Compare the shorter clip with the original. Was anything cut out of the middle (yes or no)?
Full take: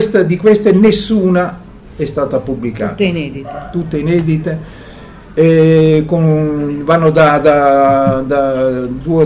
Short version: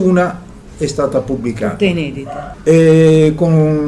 yes